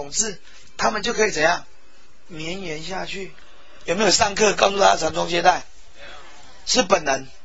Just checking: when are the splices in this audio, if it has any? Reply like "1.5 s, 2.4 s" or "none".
3.8 s

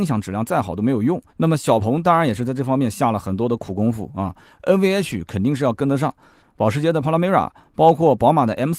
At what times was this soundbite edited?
1.3 s, 6.4 s

